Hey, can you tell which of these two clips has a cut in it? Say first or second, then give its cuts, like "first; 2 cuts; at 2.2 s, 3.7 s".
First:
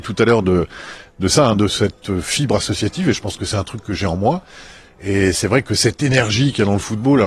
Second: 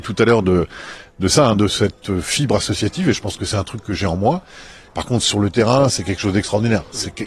second; 1 cut; at 4.9 s